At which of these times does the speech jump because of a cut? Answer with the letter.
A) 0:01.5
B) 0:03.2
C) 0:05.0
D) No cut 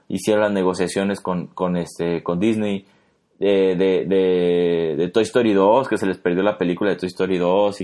D